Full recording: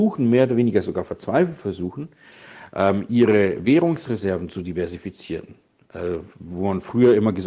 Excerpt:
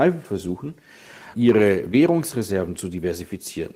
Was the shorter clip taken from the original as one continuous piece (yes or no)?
no